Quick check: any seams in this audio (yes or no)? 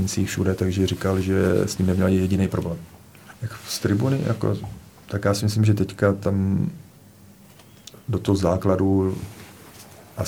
yes